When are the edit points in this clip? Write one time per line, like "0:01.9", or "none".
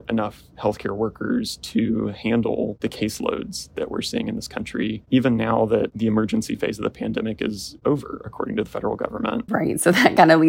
0:09.5